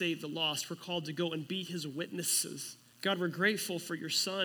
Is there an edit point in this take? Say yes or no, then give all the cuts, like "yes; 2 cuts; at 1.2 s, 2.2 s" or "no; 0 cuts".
yes; 1 cut; at 2.9 s